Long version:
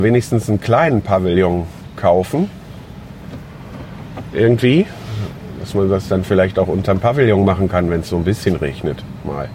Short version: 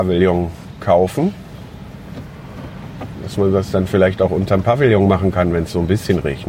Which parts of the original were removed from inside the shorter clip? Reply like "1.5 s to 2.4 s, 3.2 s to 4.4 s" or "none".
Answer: 4.3 s to 5.5 s